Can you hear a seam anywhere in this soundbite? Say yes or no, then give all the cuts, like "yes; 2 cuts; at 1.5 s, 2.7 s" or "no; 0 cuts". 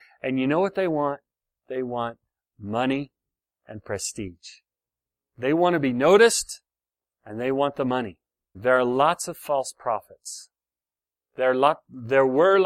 yes; 2 cuts; at 7.0 s, 8.5 s